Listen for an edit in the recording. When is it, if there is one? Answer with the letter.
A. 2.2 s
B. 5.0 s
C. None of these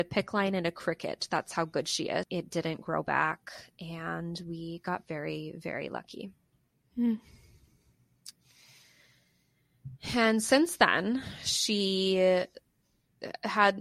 A